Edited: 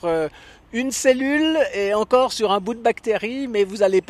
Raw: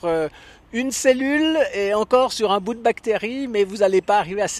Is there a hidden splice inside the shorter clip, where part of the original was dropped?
no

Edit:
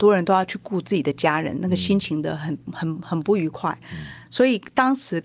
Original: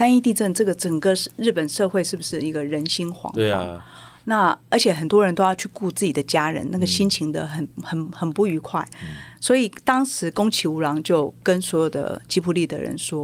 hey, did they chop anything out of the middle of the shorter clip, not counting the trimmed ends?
no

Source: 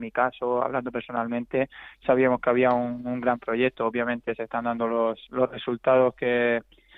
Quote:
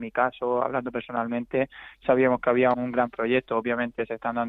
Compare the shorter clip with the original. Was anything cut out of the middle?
yes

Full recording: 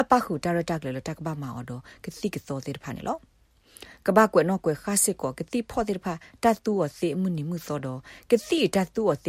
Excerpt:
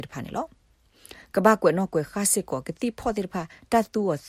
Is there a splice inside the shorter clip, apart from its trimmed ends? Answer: no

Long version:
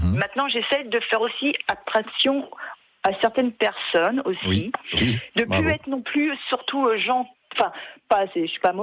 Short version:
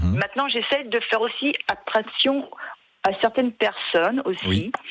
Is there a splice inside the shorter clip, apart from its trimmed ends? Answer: no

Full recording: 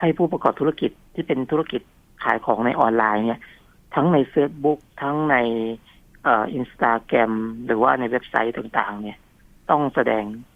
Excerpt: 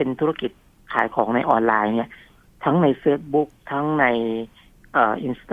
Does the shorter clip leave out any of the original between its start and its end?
no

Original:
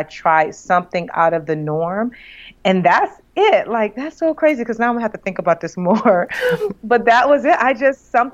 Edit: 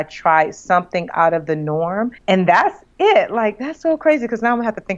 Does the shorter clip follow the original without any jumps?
no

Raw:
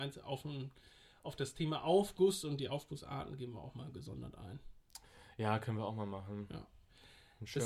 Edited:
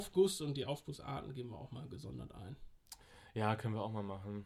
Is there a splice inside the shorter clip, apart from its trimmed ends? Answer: no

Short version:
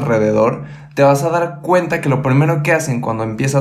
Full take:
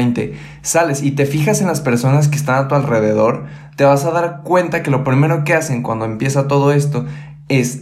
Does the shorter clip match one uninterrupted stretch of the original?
yes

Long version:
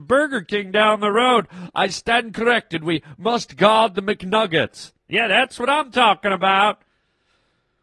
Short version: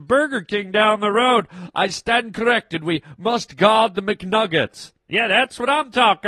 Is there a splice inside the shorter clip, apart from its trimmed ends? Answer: no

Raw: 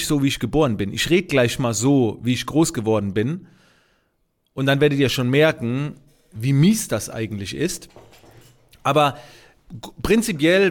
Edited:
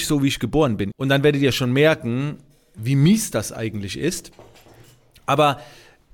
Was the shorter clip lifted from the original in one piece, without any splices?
no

